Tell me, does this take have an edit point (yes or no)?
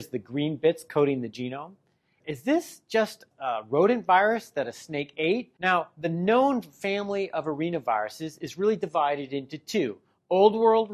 yes